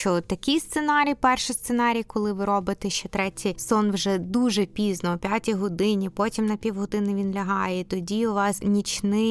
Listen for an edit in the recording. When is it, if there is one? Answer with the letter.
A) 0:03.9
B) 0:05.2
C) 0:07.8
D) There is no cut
D